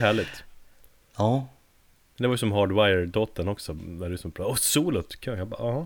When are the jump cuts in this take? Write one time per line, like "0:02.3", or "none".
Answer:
none